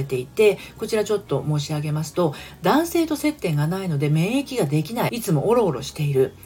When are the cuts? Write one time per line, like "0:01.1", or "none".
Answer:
0:05.1

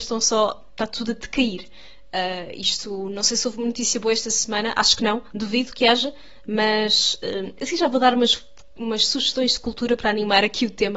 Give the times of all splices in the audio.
none

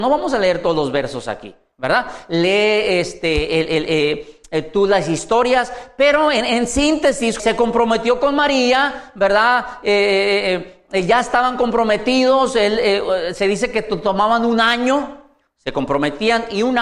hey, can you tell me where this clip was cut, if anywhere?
0:07.4

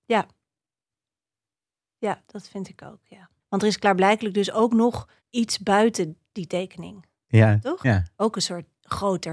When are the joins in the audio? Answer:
0:03.4
0:05.2
0:07.8

